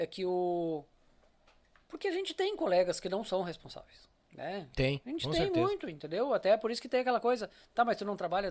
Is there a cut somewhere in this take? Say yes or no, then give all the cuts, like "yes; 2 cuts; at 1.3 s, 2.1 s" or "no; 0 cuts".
yes; 1 cut; at 4.2 s